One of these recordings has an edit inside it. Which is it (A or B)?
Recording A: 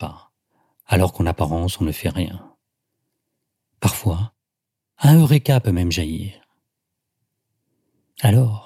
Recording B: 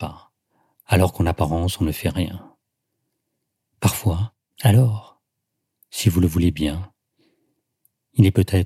B